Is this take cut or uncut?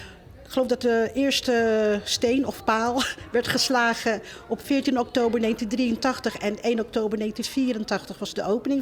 uncut